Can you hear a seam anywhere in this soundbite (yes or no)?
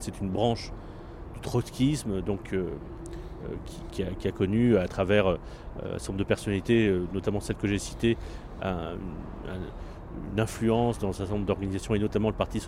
yes